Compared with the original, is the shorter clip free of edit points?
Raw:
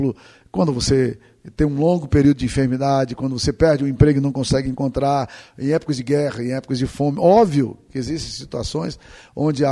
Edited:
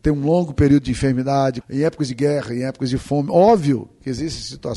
no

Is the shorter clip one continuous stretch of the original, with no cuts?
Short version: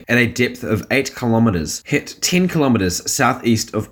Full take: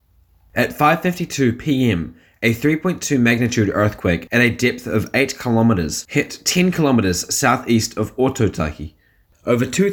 yes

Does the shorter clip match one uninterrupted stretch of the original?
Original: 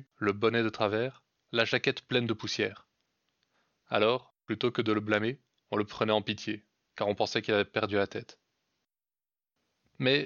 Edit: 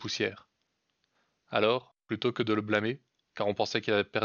no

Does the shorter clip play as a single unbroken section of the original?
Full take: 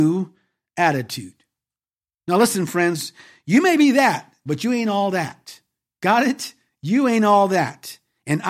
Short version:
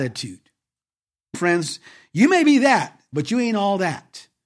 no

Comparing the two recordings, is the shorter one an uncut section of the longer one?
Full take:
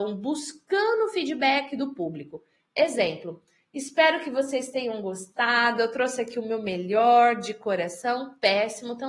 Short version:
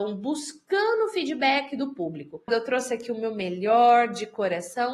no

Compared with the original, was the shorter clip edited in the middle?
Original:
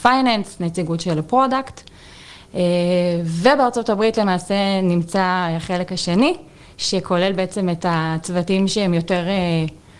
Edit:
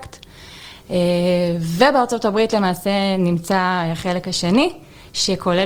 no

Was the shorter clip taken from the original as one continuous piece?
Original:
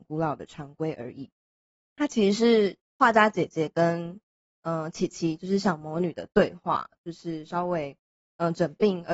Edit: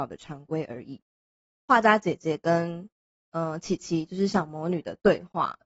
no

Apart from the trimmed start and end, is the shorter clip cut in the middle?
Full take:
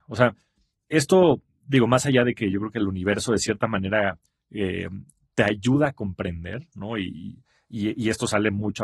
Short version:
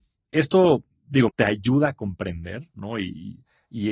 yes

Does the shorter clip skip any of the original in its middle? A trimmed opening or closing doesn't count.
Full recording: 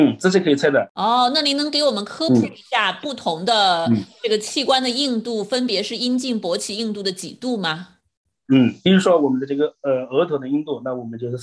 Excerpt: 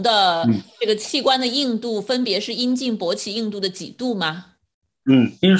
no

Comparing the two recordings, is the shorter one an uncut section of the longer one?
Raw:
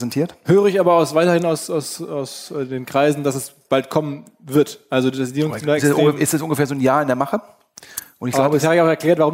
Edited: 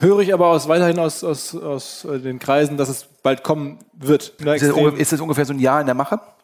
no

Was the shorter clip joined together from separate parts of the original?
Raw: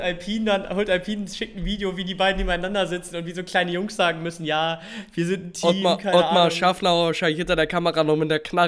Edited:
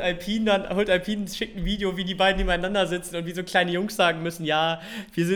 no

